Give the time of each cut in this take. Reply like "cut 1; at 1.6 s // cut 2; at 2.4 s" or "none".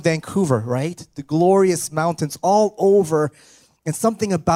none